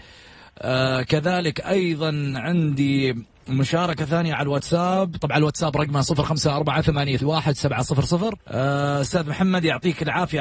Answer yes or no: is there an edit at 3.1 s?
no